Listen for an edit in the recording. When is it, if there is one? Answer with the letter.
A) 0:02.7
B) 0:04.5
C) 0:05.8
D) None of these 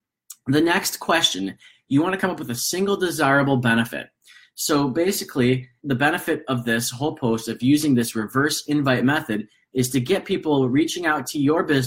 C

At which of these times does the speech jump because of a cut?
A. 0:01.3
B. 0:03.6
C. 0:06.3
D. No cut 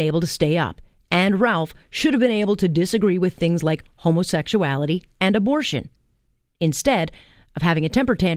D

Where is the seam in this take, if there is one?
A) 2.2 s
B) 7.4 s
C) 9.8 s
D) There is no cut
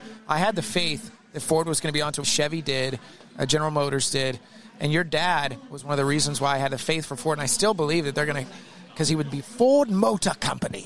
A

